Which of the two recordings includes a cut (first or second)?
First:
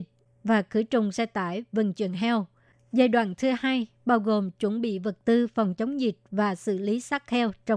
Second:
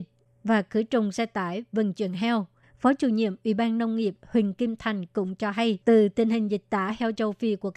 second